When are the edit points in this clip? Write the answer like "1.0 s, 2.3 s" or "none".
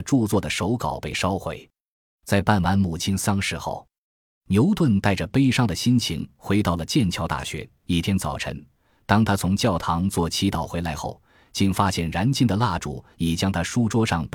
none

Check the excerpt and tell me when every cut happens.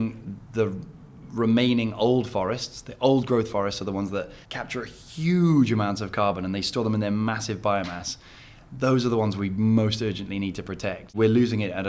4.4 s

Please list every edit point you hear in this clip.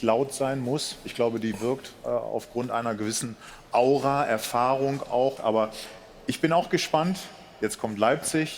5.4 s

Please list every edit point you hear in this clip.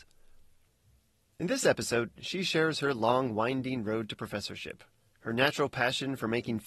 none

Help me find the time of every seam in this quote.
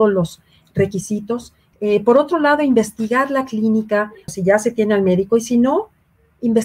1.7 s, 4.3 s

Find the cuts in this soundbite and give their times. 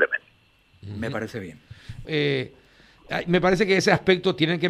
2.0 s

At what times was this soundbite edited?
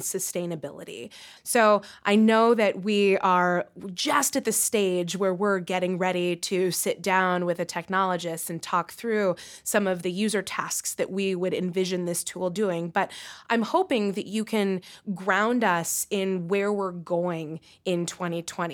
1.4 s

